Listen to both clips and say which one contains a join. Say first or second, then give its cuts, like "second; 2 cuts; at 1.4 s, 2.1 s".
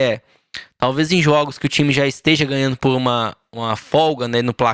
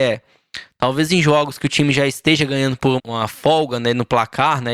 second; 1 cut; at 3.0 s